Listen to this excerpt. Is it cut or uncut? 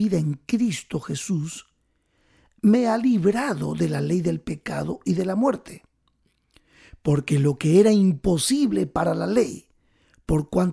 uncut